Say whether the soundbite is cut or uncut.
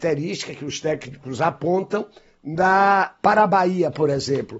uncut